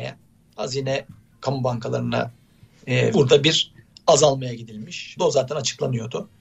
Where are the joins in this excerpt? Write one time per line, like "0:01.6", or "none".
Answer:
0:03.1
0:05.2